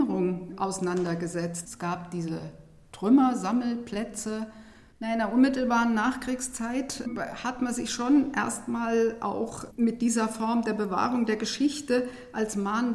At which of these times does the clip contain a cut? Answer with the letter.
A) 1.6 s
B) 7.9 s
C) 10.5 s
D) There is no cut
A